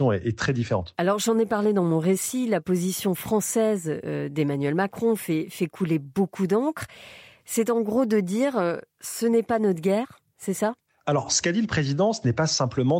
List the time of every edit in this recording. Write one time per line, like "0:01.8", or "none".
none